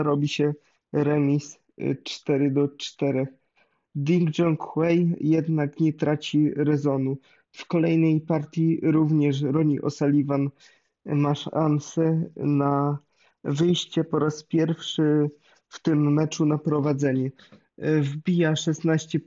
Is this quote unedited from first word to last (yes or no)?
yes